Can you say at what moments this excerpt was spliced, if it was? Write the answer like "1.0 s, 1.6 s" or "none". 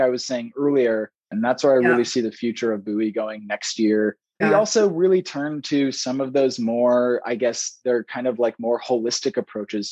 1.3 s, 4.4 s